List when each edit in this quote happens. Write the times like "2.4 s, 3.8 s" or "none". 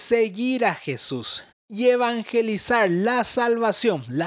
1.5 s